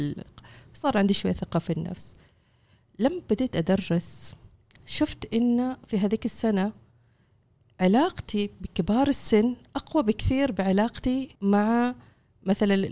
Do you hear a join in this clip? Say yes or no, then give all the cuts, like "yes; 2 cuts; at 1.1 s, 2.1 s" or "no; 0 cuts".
yes; 1 cut; at 11.4 s